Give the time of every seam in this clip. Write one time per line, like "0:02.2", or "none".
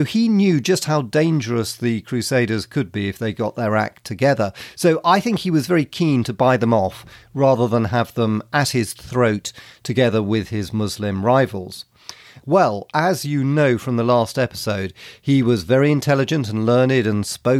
0:12.4

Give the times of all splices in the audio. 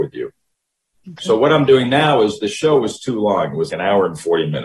0:00.9
0:03.7

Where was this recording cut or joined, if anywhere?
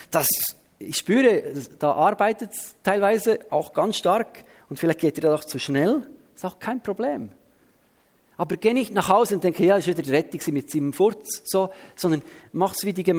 none

